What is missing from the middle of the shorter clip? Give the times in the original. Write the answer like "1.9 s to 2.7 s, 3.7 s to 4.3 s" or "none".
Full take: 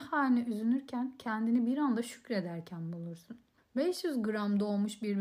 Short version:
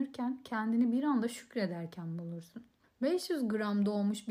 none